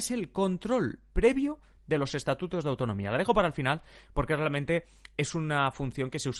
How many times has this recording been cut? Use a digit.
0